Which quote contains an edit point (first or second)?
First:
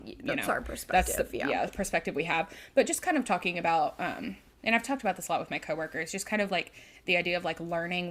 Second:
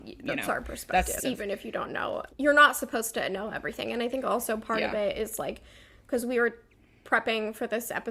second